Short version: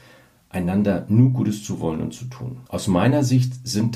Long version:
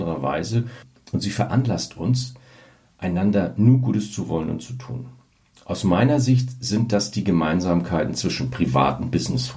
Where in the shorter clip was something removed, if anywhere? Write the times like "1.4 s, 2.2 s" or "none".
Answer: 2.7 s